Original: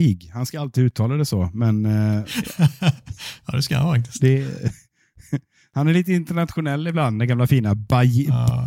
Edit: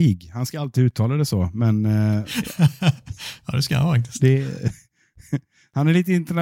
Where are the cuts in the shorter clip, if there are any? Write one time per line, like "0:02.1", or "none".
none